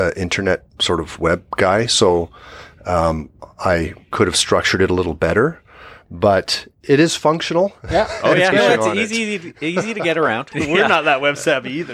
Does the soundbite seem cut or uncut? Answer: cut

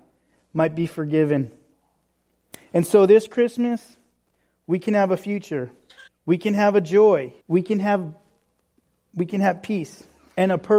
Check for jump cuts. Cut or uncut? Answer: cut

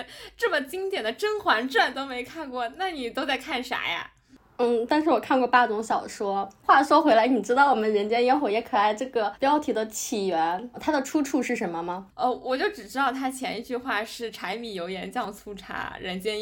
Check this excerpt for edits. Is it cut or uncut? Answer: uncut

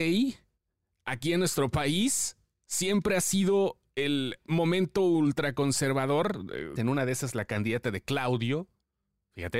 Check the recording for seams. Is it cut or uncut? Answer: cut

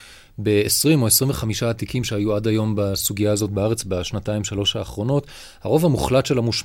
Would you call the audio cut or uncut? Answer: uncut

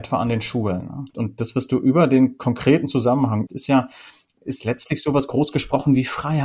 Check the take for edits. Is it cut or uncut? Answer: cut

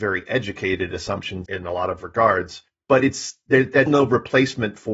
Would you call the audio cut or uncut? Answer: cut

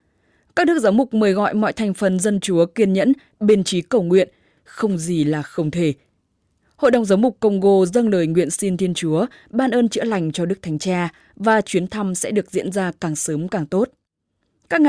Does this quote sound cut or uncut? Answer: cut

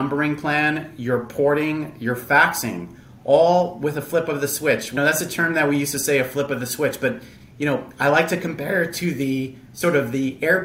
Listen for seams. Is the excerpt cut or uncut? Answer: cut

